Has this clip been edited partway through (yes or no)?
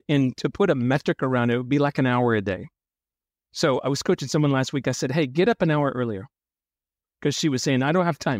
no